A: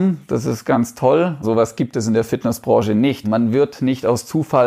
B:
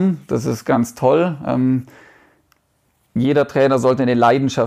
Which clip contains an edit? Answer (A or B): A